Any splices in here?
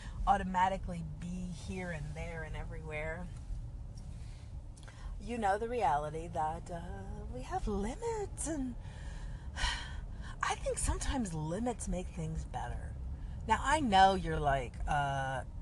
no; 0 cuts

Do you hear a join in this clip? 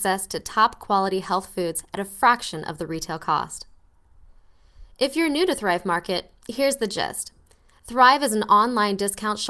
no; 0 cuts

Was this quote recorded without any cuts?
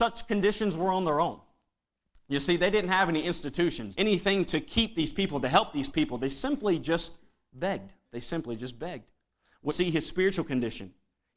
no; 3 cuts; at 3.9 s, 8.0 s, 9.7 s

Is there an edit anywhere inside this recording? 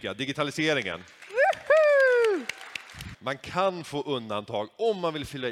yes; 1 cut; at 3.1 s

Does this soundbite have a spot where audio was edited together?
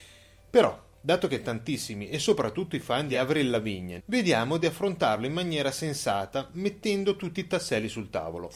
yes; 1 cut; at 4.0 s

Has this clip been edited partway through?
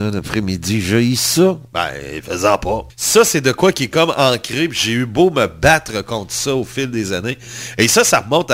yes; 1 cut; at 2.9 s

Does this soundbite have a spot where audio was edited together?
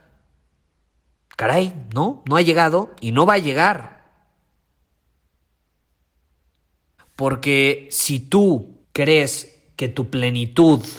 yes; 2 cuts; at 7.0 s, 8.8 s

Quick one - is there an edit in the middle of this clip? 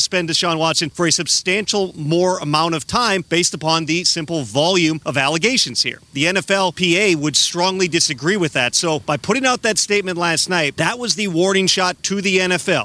no; 0 cuts

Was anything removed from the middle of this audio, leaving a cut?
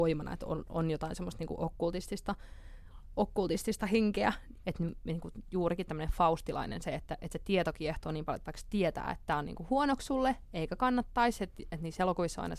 yes; 1 cut; at 4.6 s

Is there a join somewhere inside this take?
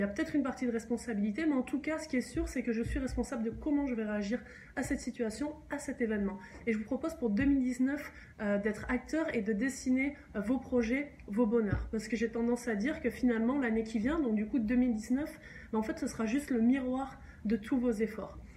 no; 0 cuts

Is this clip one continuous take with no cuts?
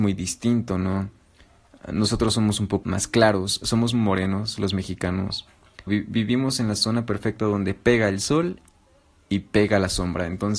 no; 2 cuts; at 2.8 s, 5.9 s

